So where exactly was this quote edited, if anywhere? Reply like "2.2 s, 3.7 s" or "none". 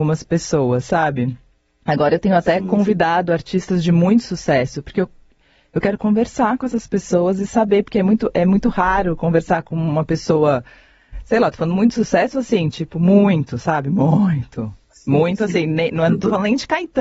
none